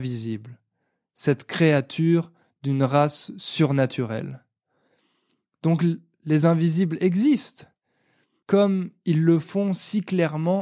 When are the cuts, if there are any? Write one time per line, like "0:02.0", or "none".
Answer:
0:08.4